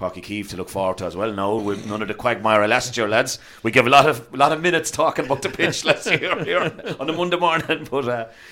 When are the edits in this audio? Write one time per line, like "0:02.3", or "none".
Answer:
none